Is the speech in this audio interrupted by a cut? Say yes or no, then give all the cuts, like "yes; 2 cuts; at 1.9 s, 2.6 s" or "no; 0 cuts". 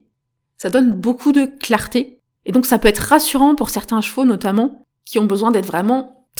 no; 0 cuts